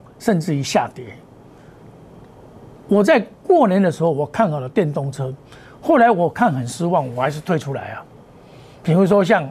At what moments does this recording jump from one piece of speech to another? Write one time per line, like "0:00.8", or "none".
none